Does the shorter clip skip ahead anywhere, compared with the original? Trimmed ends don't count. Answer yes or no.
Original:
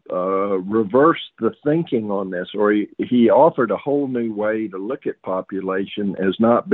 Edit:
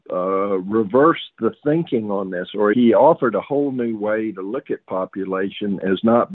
yes